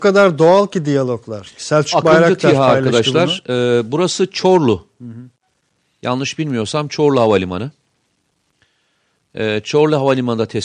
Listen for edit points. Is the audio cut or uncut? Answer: uncut